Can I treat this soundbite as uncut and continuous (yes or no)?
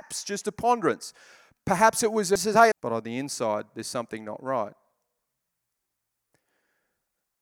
no